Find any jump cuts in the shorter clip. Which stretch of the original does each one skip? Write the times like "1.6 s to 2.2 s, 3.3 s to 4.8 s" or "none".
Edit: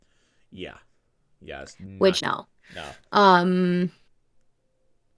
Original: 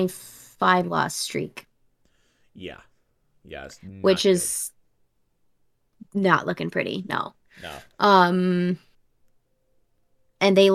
4.2 s to 7.1 s